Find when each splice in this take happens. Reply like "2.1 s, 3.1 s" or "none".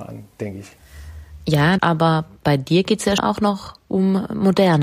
1.8 s, 3.2 s